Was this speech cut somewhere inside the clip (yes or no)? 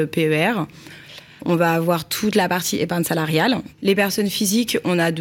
yes